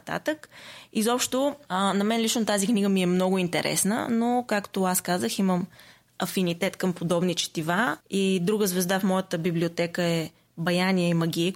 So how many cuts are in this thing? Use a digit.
1